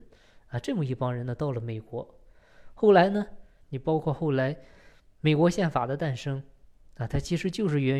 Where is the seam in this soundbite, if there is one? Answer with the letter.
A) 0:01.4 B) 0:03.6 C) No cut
B